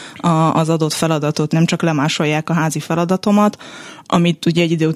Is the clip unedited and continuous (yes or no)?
no